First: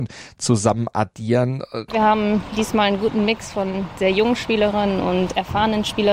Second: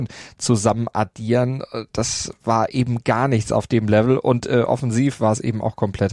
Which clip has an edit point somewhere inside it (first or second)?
first